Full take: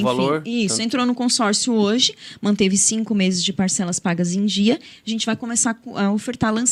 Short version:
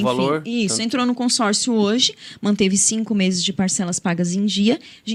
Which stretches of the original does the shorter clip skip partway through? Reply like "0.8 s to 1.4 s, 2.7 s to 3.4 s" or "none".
none

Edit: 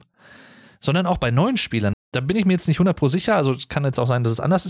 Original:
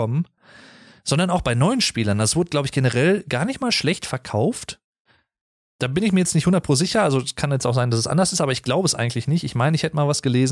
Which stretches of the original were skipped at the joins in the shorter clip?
2.2 s to 5.6 s

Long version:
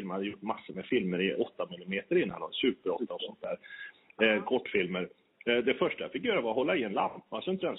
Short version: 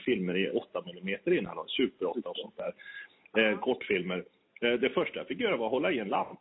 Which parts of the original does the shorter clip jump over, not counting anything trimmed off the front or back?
none

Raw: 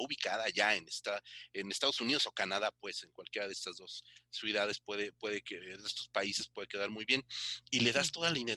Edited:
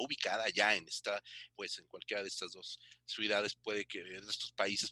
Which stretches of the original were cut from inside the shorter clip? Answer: 1.5 s to 2.7 s, 4.8 s to 5.1 s

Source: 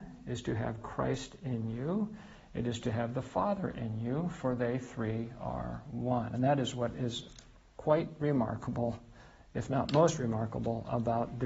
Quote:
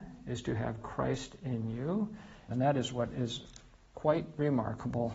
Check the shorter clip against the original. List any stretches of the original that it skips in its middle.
2.5 s to 6.3 s

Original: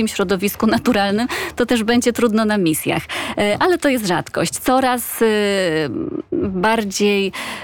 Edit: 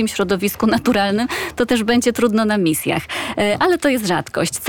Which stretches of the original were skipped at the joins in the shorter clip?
none

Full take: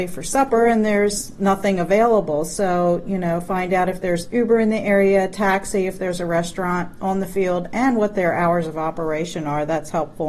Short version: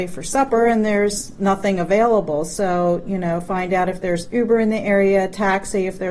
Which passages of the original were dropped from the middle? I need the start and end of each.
none

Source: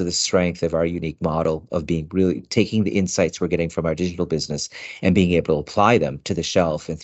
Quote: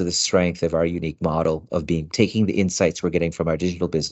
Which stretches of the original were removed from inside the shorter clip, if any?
2.1 s to 2.5 s

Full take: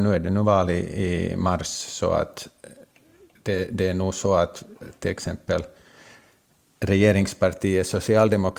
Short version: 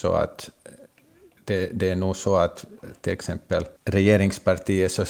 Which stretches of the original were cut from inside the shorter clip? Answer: 5.7 s to 6.7 s

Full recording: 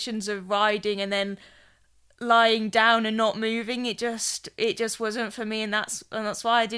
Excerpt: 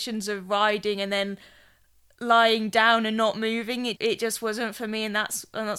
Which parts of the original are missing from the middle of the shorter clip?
4.0 s to 4.5 s

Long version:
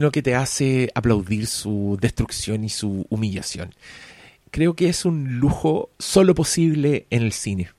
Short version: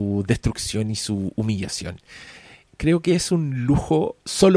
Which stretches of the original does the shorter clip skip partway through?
none

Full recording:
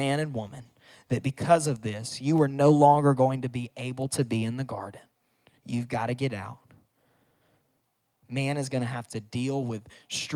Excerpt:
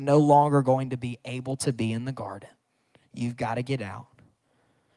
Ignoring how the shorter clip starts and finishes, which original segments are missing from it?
none

